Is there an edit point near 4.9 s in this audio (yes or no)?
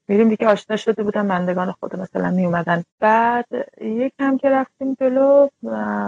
no